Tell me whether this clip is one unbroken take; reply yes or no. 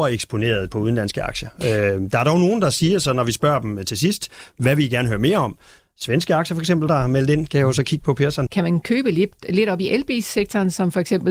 no